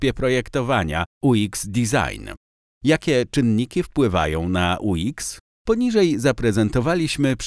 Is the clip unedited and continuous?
yes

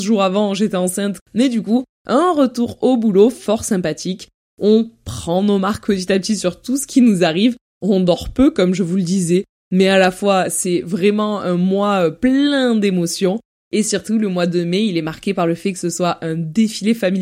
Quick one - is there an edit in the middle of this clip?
yes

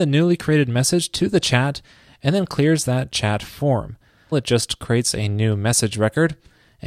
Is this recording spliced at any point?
yes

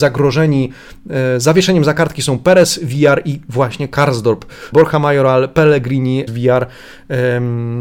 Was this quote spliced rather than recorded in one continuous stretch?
yes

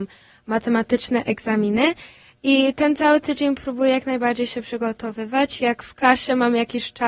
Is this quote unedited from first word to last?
yes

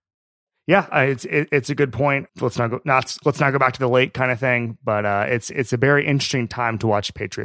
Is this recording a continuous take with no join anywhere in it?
no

